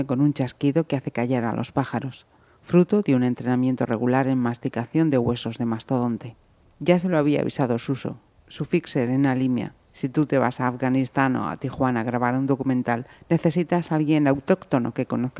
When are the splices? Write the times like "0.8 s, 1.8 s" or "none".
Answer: none